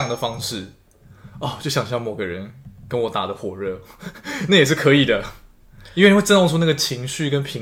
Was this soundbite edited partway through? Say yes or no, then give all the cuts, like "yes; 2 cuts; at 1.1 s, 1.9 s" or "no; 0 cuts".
no; 0 cuts